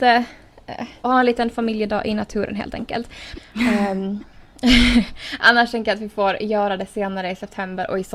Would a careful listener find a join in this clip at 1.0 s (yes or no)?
yes